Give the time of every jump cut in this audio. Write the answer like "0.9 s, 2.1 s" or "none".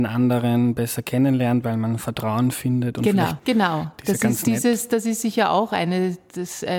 3.4 s

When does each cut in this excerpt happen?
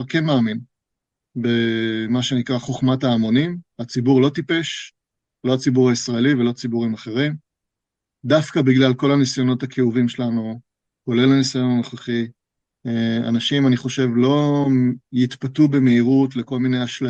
3.7 s

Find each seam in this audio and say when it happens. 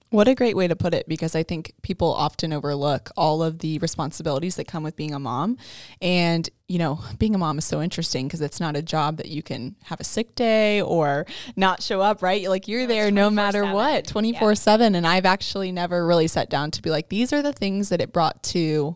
6.6 s

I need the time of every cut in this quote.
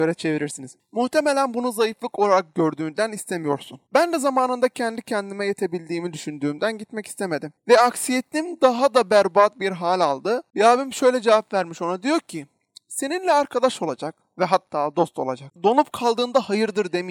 10.5 s, 15.5 s

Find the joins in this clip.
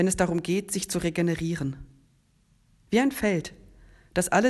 none

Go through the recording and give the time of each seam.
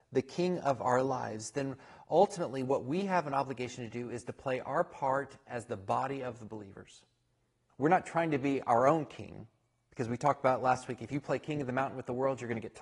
7.7 s

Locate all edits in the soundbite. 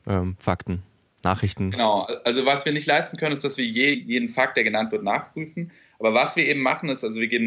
3.9 s

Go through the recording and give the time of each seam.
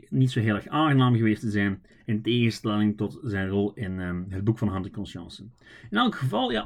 none

